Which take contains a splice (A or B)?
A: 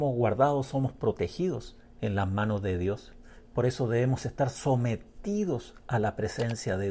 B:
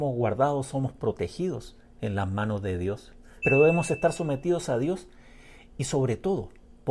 B